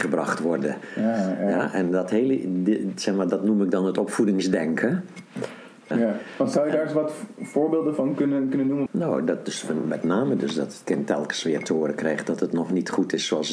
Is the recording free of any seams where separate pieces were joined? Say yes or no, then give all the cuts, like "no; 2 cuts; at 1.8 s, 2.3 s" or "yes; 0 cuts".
no; 2 cuts; at 5.9 s, 8.9 s